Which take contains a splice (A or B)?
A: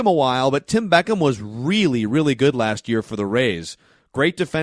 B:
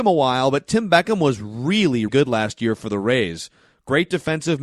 B